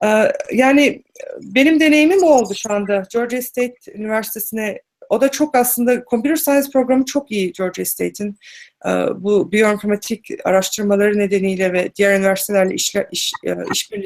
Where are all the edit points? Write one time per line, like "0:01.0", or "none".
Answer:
none

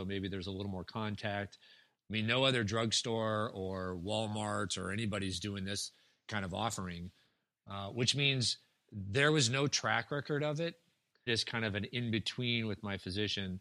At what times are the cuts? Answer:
0:01.9
0:11.3

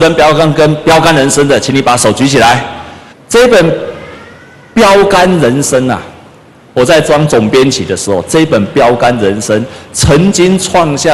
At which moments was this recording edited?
0:03.1

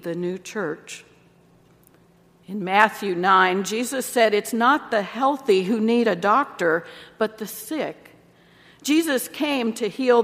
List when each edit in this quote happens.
none

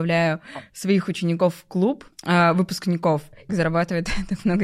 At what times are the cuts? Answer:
0:02.1
0:03.5

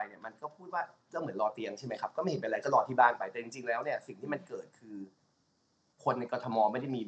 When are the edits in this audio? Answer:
none

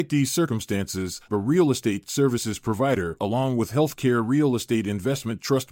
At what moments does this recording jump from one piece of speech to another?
0:01.3

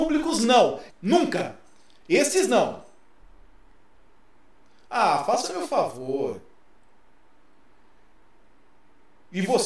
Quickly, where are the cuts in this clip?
0:00.9

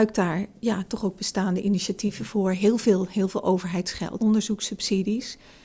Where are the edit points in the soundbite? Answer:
0:04.2

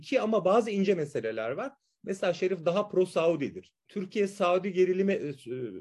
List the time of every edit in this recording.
0:03.8

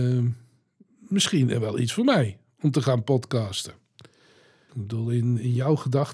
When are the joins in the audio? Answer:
0:04.7

